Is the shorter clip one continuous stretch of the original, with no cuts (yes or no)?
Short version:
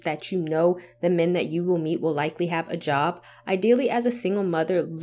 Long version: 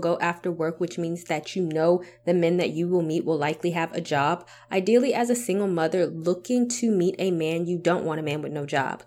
yes